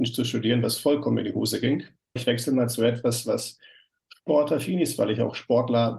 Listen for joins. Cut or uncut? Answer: cut